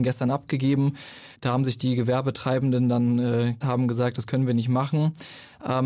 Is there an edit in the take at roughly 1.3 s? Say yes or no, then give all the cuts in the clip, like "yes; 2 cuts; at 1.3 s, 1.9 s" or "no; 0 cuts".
yes; 2 cuts; at 1.3 s, 3.6 s